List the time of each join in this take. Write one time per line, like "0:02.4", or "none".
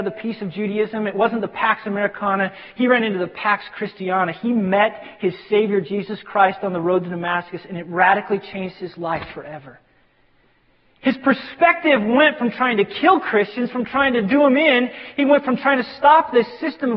none